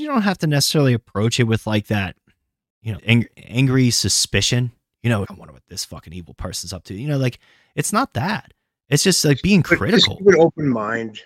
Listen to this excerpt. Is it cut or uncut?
cut